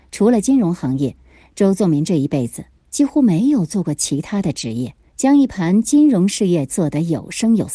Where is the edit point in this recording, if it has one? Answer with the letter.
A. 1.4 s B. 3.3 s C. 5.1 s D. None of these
C